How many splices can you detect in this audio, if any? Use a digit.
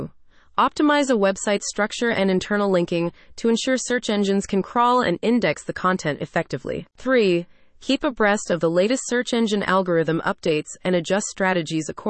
0